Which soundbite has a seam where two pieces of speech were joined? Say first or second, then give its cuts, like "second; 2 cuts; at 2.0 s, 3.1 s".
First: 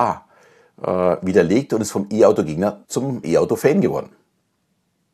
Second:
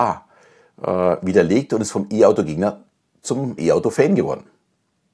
first; 1 cut; at 2.8 s